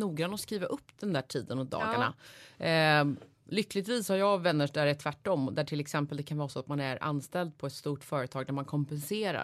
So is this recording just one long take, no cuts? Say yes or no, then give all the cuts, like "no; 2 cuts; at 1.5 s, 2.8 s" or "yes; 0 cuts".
yes; 0 cuts